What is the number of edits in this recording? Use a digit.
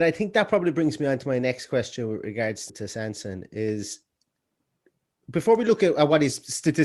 1